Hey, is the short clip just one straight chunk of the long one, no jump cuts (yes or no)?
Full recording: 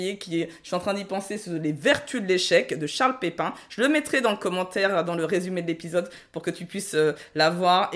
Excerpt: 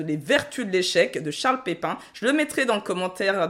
yes